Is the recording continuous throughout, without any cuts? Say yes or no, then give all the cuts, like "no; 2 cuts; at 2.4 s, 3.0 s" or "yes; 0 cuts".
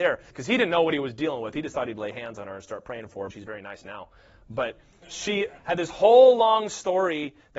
no; 1 cut; at 3.3 s